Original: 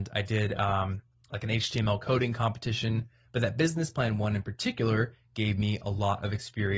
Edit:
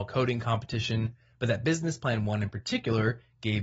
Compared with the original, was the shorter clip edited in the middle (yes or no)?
no